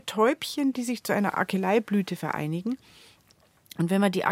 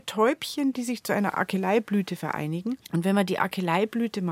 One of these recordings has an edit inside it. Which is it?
second; 1 cut; at 2.8 s

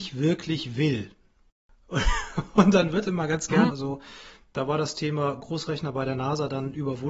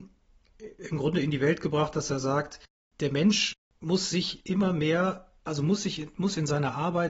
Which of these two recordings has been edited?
first; 1 cut; at 3.7 s

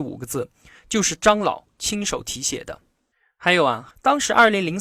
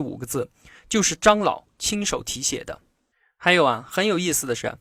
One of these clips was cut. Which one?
first; 1 cut; at 3.9 s

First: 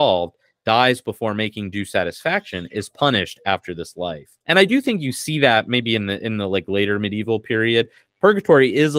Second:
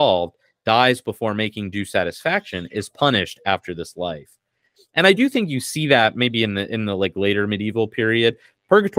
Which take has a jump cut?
first; 1 cut; at 4.4 s

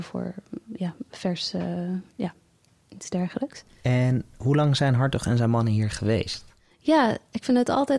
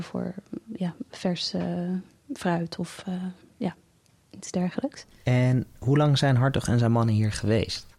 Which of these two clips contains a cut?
first; 1 cut; at 2.1 s

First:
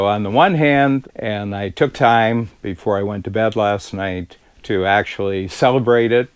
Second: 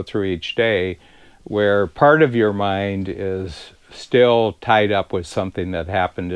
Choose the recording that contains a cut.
first; 1 cut; at 1.1 s

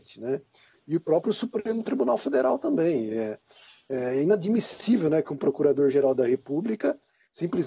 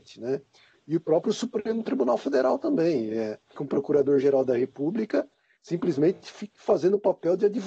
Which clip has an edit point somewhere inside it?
second; 1 cut; at 3.5 s

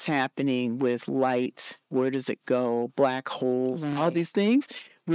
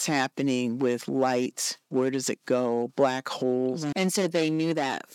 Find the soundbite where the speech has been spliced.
second; 1 cut; at 3.9 s

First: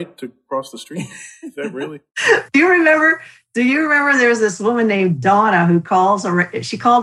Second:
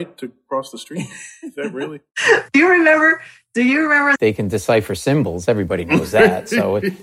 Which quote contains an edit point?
second; 1 cut; at 4.1 s

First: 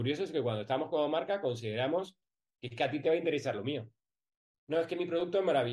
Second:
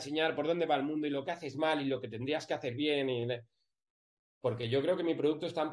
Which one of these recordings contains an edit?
first; 1 cut; at 4.5 s

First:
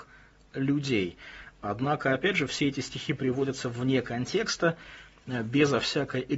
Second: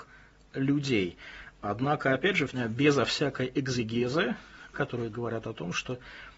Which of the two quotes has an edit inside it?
second; 2 cuts; at 2.5 s, 4.7 s

